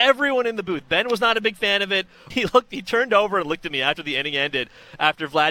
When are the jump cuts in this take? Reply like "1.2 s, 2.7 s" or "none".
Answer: 2.3 s